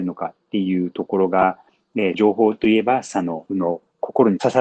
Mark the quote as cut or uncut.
cut